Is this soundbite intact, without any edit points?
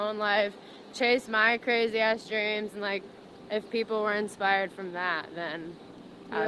yes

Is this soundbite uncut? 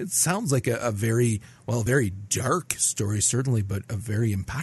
yes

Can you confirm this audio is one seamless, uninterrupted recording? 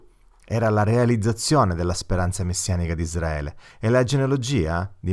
yes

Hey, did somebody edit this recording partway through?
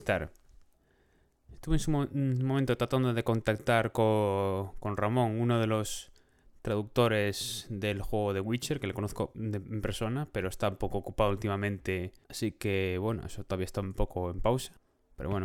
no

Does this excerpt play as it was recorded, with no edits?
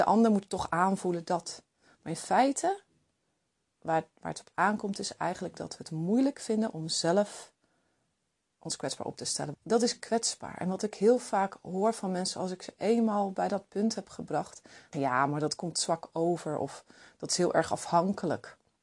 no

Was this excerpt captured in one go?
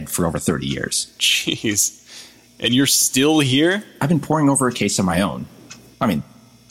yes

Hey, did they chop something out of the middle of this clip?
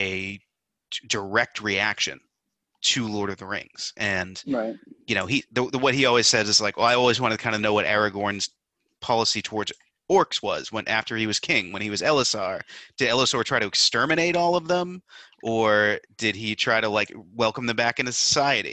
no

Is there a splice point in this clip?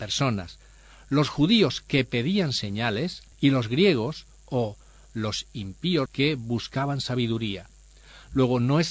yes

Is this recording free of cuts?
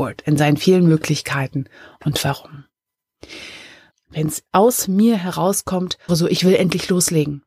no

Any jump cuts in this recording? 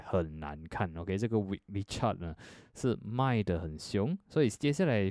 no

